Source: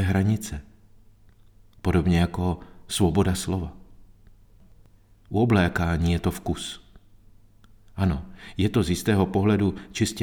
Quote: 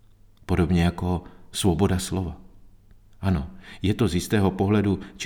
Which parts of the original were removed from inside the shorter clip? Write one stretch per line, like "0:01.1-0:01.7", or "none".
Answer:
0:04.4-0:07.8